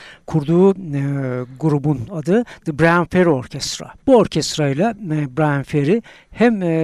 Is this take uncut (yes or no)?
no